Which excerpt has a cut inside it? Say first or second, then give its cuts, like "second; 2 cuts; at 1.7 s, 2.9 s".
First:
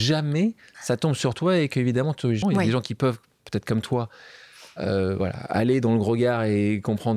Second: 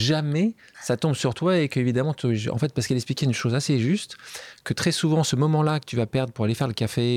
first; 1 cut; at 2.4 s